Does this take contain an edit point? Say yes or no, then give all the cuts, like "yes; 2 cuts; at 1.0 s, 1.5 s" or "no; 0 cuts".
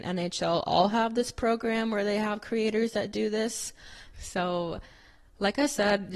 yes; 1 cut; at 4.1 s